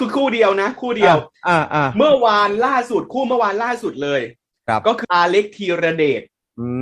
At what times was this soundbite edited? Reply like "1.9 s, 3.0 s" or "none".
5.0 s